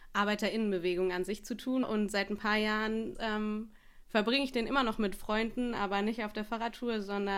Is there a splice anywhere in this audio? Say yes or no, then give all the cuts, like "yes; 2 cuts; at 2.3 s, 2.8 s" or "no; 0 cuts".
yes; 2 cuts; at 1.8 s, 3.1 s